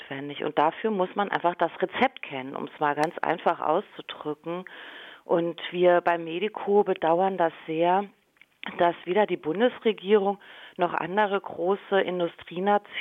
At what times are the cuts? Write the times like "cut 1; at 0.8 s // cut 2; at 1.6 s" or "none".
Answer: none